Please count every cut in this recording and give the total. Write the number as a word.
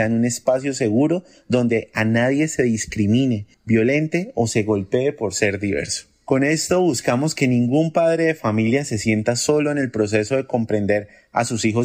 zero